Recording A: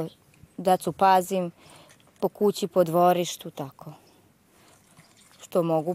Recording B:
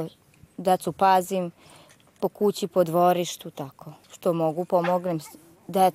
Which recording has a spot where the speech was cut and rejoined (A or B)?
B